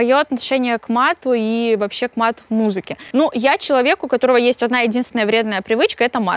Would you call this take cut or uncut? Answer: uncut